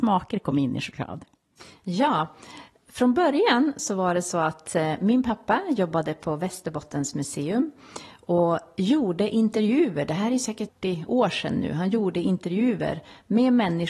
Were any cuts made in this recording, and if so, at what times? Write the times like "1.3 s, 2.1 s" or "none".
10.7 s